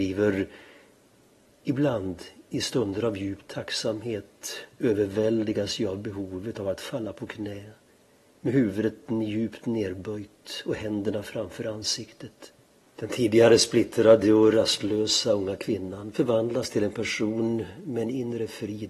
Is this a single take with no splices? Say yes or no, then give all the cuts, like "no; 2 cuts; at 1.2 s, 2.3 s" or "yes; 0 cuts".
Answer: no; 1 cut; at 12.8 s